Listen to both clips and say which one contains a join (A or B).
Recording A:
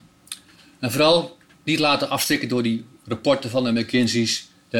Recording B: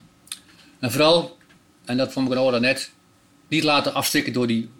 A